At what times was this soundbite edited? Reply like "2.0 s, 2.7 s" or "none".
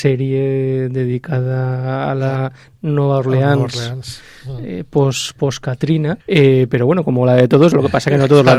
6.2 s